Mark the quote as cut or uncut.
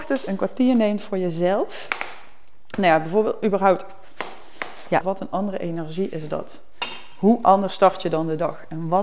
cut